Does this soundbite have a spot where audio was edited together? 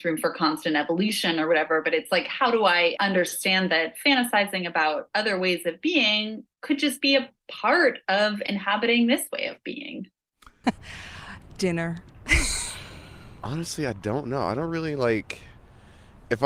yes; 2 cuts; at 3.0 s, 10.6 s

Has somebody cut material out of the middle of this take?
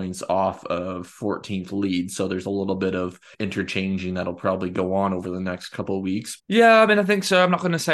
yes; 2 cuts; at 3.3 s, 6.4 s

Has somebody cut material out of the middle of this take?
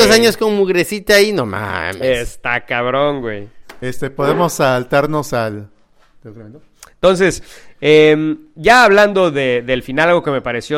yes; 1 cut; at 3.8 s

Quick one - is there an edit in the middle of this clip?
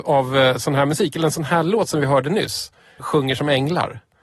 yes; 1 cut; at 3.0 s

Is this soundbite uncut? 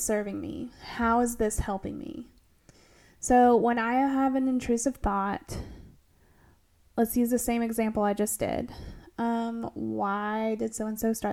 yes; 0 cuts

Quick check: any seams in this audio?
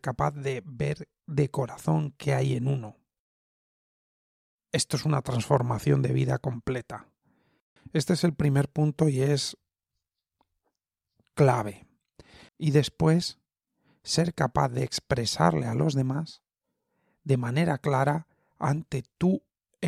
yes; 2 cuts; at 7.8 s, 12.5 s

